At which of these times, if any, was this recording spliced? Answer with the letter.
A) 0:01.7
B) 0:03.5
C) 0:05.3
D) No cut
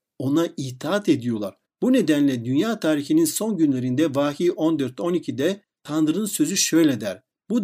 A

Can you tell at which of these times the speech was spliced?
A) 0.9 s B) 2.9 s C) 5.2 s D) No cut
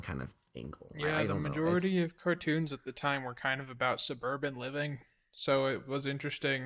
D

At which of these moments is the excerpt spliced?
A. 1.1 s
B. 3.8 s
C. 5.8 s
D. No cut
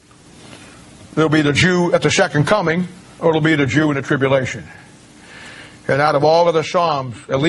D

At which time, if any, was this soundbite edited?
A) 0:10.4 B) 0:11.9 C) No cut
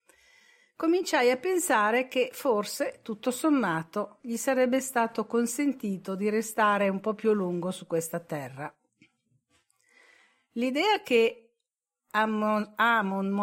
C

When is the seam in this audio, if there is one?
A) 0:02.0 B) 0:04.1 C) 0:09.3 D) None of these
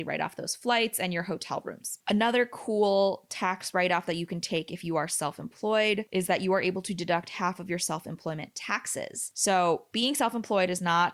A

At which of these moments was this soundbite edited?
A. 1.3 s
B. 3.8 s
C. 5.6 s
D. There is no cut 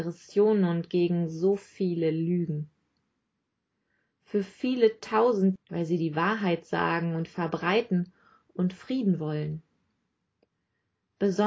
C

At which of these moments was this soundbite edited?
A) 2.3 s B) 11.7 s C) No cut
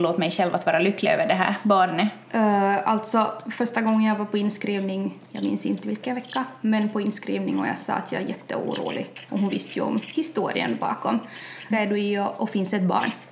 B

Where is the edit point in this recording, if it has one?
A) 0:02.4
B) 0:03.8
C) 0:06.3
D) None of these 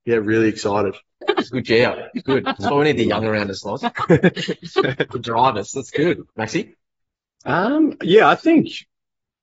C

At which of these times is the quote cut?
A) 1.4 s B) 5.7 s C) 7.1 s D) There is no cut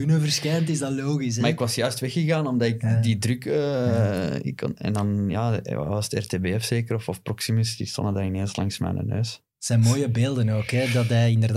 D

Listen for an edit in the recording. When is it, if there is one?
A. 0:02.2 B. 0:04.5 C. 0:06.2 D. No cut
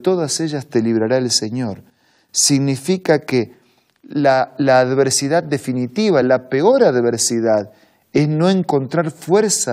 C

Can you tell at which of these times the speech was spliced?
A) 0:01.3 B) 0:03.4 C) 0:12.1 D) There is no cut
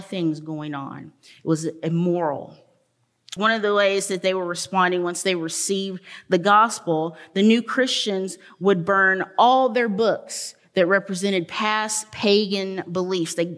B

